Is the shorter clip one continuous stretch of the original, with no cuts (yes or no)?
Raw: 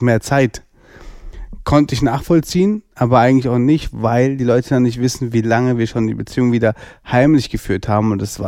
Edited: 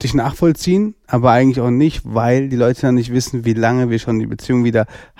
yes